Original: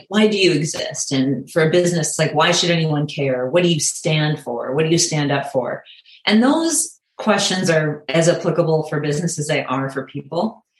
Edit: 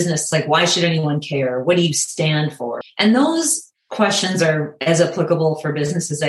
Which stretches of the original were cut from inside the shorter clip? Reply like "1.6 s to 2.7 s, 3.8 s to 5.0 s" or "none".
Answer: 4.7 s to 6.1 s